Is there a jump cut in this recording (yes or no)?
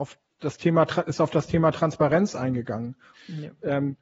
yes